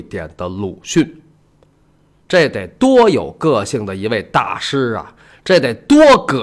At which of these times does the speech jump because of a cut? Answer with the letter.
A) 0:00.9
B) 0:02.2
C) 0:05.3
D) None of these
B